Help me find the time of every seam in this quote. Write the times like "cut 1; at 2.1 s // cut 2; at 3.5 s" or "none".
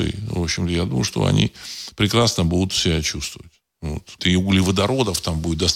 cut 1; at 4.2 s